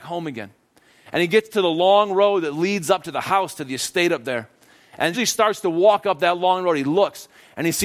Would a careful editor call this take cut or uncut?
cut